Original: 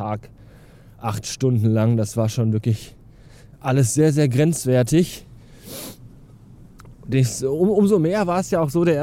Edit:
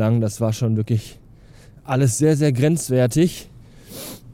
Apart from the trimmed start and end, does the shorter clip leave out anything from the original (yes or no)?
no